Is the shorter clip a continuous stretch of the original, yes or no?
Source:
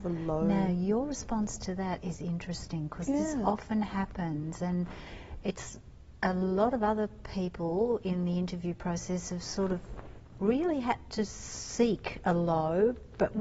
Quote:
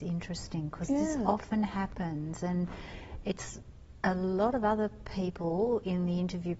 yes